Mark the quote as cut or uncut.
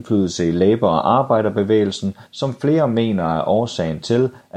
uncut